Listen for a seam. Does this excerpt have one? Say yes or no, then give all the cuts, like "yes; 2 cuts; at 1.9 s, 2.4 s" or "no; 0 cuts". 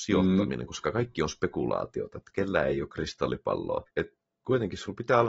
yes; 1 cut; at 3.9 s